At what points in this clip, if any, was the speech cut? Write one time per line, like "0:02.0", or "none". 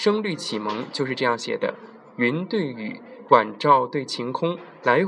0:03.3

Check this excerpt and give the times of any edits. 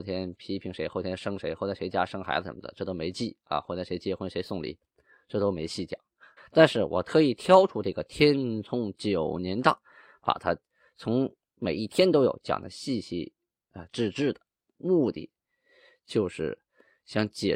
0:06.4

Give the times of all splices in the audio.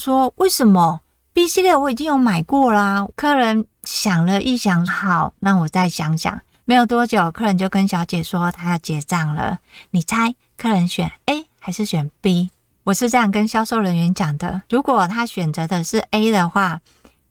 0:03.1
0:04.9

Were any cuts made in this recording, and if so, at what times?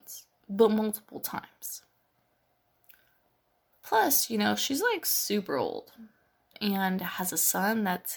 0:03.7
0:06.5

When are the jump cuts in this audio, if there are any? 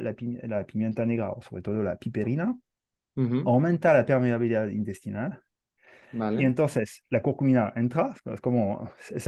none

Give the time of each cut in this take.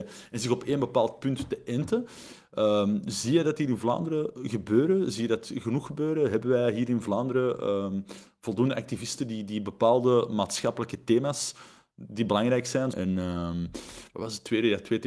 0:12.9

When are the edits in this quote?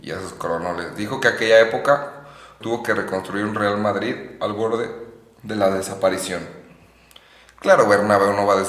0:02.6

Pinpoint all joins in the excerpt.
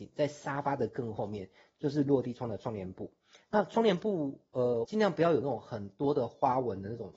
0:04.8

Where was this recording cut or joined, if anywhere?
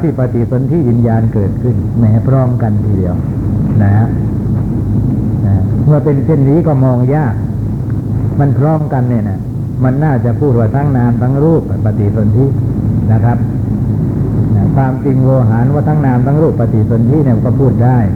none

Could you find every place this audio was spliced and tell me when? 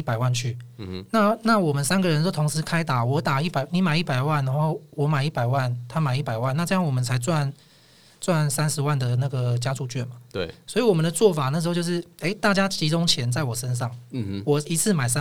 none

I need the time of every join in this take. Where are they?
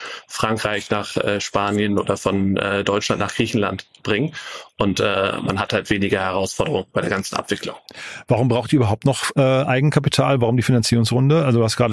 none

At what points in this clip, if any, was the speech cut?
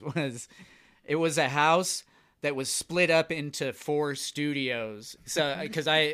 0:05.2

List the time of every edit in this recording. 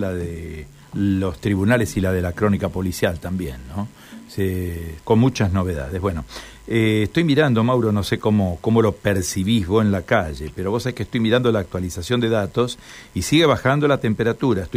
0:05.0

